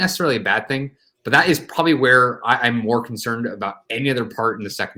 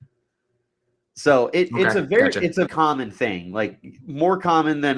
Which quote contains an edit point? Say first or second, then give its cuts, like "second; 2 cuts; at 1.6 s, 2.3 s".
second; 1 cut; at 2.7 s